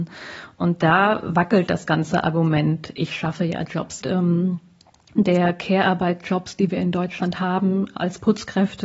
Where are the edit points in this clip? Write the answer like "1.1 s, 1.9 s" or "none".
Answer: 4.0 s